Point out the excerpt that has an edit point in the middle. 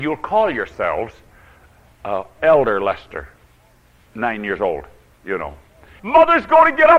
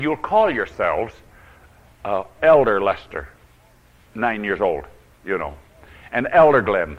first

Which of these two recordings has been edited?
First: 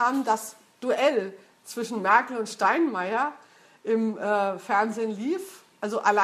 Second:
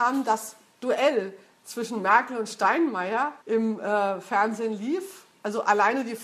second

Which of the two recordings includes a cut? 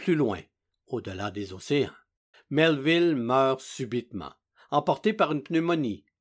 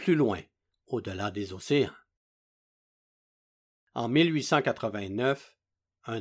first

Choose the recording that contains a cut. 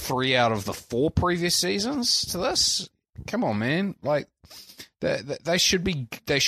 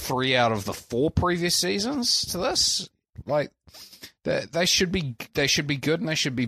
second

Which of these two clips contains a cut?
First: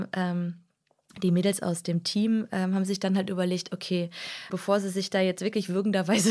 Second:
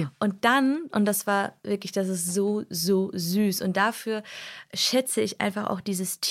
first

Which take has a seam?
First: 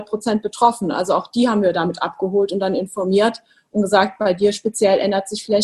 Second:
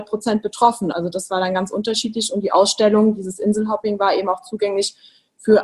second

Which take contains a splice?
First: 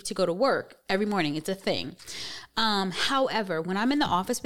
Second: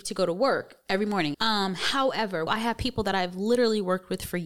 second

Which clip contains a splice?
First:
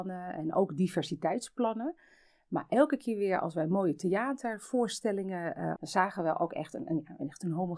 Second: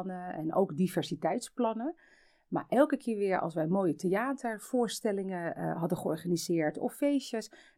first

